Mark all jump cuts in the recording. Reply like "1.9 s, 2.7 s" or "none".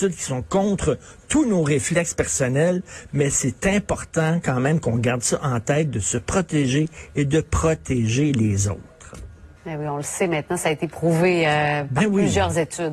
9.6 s